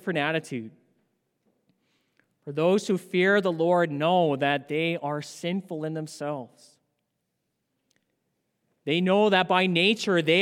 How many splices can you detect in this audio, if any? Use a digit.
0